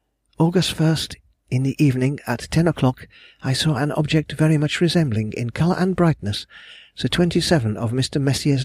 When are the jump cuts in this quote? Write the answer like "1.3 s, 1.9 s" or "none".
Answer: none